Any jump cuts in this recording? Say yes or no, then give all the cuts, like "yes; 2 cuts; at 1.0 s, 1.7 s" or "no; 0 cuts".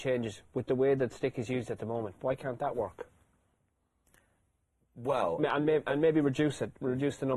no; 0 cuts